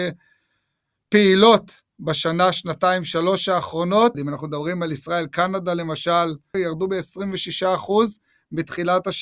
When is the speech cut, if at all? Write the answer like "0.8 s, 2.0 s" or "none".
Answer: 4.1 s, 6.5 s